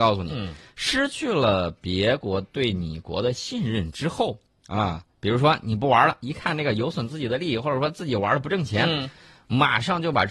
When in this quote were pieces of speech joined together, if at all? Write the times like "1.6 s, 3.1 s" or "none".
none